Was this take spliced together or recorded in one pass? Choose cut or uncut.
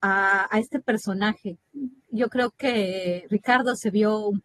uncut